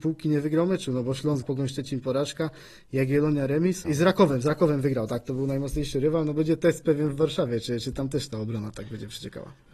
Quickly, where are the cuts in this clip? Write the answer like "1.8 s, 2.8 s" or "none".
1.4 s, 3.8 s